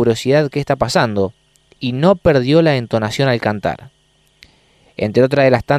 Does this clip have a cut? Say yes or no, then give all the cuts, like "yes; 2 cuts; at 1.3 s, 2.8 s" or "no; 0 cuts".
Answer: no; 0 cuts